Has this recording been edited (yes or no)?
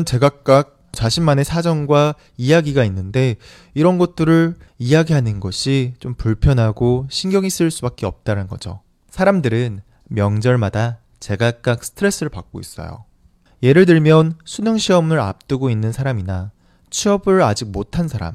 yes